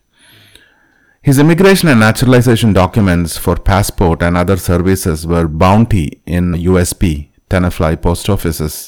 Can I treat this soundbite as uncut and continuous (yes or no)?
no